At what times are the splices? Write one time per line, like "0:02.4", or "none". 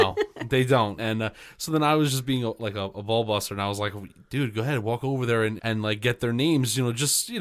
0:01.0
0:05.6